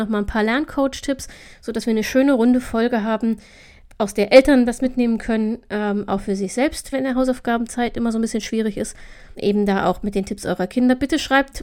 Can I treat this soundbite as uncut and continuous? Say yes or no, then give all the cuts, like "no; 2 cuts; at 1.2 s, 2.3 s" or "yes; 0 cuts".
no; 2 cuts; at 6.9 s, 9.3 s